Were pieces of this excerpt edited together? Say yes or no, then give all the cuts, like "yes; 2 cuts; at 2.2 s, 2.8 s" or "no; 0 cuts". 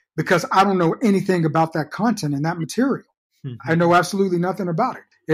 no; 0 cuts